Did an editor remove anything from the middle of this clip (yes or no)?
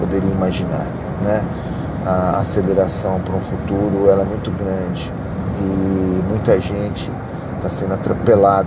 no